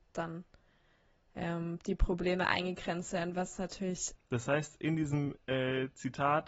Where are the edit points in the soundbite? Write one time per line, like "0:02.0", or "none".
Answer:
0:04.1